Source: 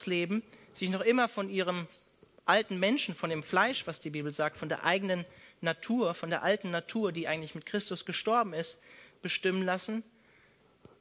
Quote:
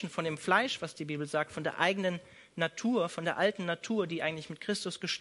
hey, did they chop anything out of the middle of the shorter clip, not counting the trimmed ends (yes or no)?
no